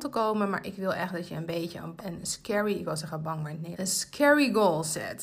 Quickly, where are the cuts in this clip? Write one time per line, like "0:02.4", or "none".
0:02.0
0:03.7